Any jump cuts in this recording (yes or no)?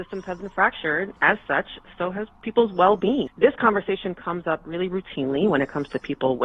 no